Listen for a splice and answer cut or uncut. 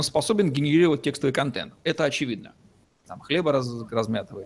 cut